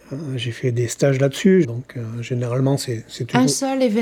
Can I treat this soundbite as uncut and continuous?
no; 1 cut; at 1.6 s

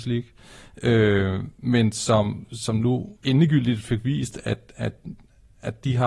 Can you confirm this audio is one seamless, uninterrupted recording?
no; 1 cut; at 3.2 s

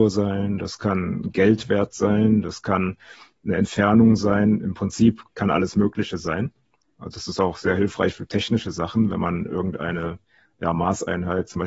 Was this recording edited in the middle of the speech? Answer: no; 0 cuts

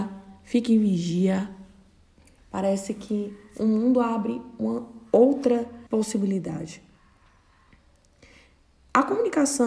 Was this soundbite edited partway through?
yes; 2 cuts; at 2.4 s, 5.9 s

